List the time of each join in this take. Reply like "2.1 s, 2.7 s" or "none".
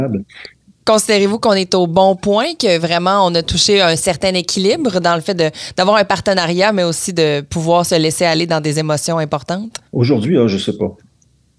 9.9 s